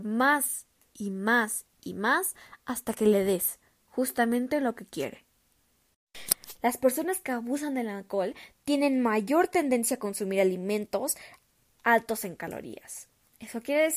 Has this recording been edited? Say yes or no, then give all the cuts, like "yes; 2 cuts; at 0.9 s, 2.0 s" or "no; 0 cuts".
yes; 1 cut; at 6.5 s